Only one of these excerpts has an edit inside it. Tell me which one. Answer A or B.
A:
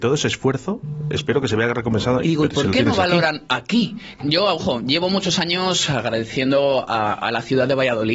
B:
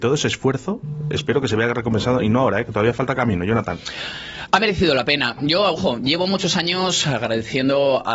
A